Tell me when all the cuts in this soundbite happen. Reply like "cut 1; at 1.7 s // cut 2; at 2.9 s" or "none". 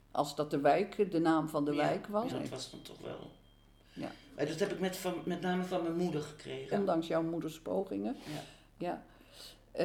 cut 1; at 2.3 s // cut 2; at 6.7 s